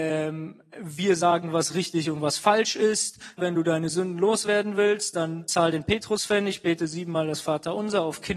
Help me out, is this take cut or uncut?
cut